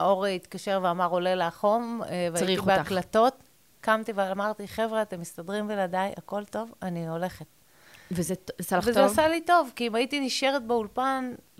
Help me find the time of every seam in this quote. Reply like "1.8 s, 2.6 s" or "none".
none

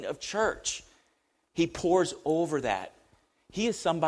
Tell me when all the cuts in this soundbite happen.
1.5 s

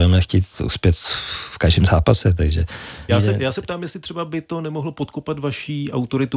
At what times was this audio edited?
3.1 s

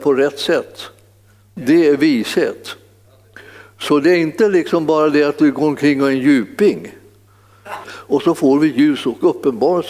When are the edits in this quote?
7.8 s

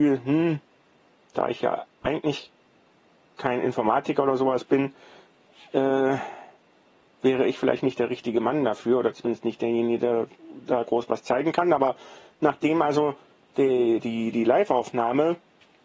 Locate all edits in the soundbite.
none

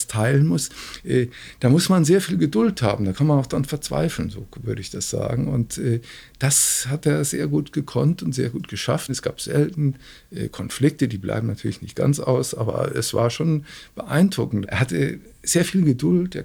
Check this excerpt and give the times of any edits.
9.1 s, 14.6 s

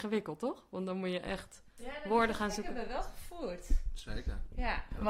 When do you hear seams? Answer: none

